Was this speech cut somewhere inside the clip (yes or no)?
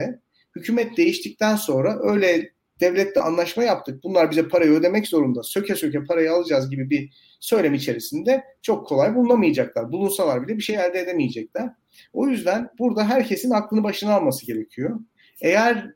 no